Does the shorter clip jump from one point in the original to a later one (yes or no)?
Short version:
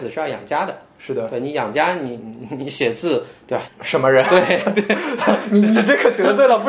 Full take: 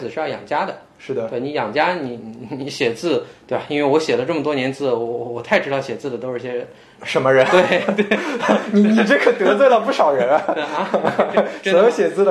yes